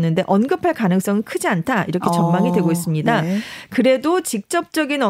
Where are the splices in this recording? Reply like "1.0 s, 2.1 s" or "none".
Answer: none